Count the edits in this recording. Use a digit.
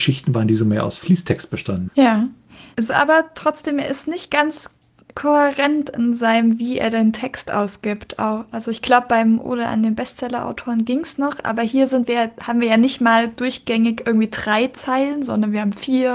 1